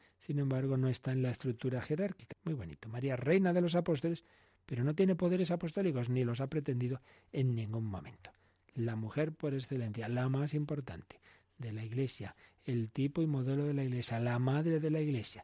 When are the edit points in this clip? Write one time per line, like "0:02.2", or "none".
0:02.3